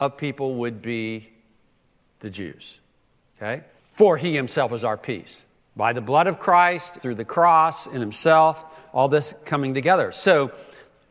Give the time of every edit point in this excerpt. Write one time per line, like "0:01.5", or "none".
0:03.8
0:05.7
0:07.0

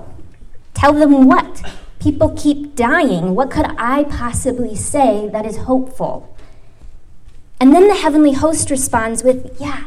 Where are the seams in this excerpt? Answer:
none

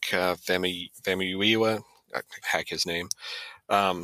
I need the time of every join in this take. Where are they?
0:02.4

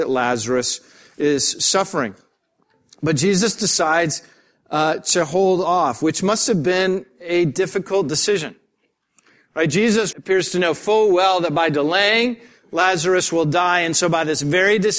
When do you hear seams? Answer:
0:10.1

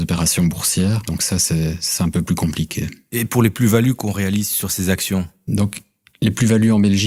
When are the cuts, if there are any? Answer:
none

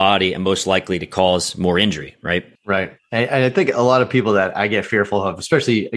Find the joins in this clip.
0:02.6

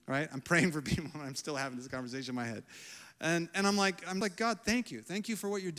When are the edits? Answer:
0:04.2

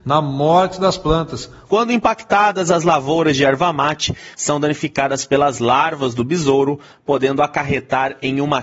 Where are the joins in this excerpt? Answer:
0:01.7
0:04.3

